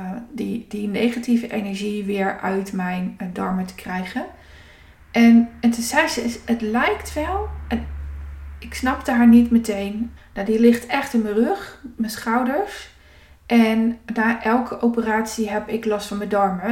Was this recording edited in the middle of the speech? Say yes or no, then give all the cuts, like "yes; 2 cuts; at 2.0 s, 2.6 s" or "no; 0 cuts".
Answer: yes; 1 cut; at 10.2 s